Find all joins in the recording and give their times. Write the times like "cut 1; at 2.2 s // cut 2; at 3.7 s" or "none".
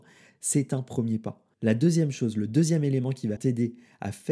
cut 1; at 1.5 s // cut 2; at 3.4 s